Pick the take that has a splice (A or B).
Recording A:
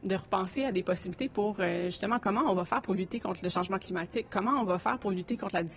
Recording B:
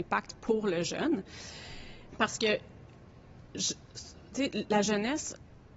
B